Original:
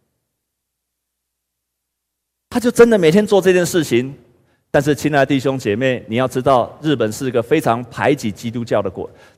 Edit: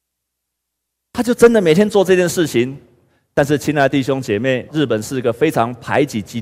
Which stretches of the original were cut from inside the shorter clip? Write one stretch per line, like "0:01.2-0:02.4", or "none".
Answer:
0:06.1-0:06.8